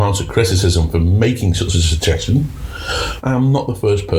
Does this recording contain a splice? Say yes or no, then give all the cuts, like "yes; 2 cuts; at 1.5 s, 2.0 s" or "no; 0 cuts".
yes; 1 cut; at 3.2 s